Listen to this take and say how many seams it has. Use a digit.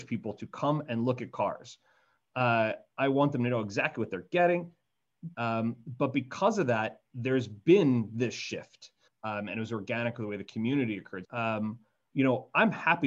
3